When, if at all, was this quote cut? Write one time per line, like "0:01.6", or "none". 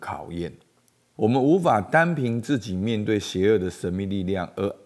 0:01.1